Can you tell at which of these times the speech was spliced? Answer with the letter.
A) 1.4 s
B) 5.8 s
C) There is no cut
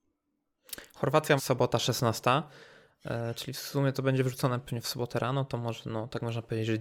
A